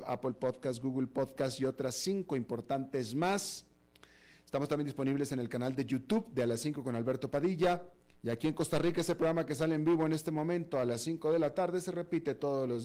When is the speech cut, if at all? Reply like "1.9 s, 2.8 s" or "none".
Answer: 8.1 s